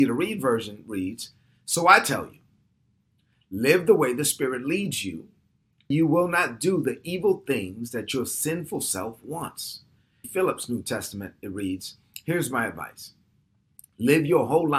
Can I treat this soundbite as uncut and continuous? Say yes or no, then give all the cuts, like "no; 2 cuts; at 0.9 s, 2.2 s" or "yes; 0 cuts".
no; 2 cuts; at 5.9 s, 10.2 s